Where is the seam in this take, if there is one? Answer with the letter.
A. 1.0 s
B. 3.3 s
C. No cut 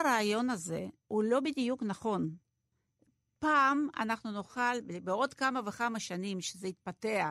A